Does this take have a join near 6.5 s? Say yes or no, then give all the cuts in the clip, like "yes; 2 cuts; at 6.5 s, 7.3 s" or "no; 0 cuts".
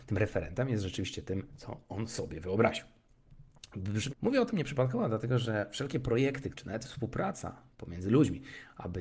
yes; 3 cuts; at 4.1 s, 6.5 s, 7.7 s